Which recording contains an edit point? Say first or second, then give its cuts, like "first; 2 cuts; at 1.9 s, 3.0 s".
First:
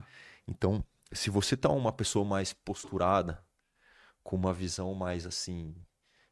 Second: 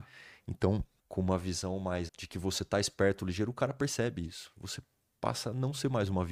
second; 2 cuts; at 1.0 s, 2.1 s